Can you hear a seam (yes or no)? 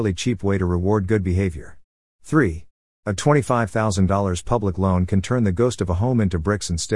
yes